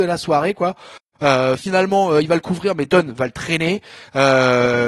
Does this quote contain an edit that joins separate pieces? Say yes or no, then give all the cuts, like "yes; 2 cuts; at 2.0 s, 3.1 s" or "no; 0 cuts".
no; 0 cuts